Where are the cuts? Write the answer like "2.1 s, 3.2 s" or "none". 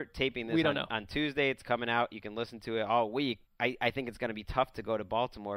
3.5 s

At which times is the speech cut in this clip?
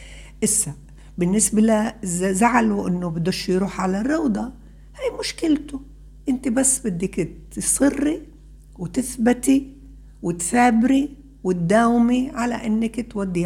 none

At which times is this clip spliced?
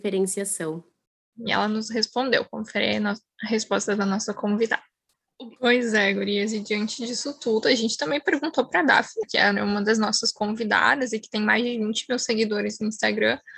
1.3 s, 5.6 s, 9.2 s

